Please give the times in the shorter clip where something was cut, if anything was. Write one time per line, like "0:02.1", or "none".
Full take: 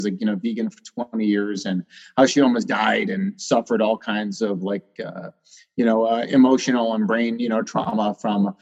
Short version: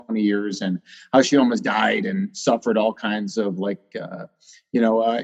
none